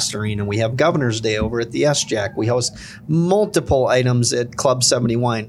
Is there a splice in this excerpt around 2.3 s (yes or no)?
no